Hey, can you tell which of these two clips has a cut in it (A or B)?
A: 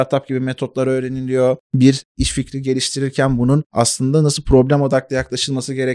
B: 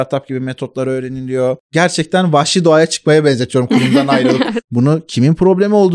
B